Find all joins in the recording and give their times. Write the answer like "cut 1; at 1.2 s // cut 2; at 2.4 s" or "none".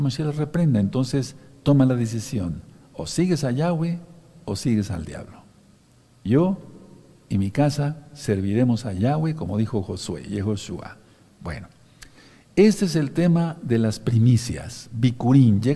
none